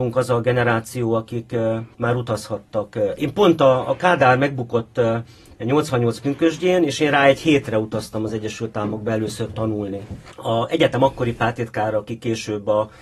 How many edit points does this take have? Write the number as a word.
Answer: one